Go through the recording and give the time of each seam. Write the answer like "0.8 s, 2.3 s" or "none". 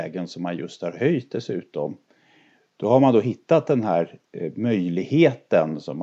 2.6 s